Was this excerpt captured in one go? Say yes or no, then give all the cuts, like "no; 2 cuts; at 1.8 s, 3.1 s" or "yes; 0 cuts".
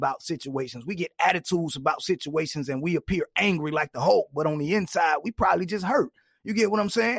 yes; 0 cuts